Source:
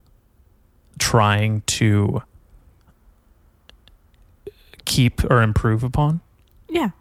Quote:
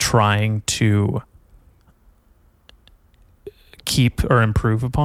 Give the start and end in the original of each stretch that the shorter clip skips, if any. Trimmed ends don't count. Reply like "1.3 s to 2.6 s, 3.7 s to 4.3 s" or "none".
none